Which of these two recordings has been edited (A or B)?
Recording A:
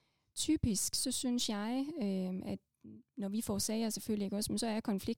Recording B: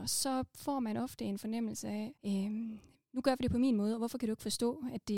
B